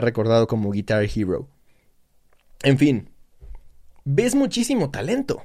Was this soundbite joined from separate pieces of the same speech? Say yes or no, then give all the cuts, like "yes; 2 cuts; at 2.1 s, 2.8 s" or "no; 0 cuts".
no; 0 cuts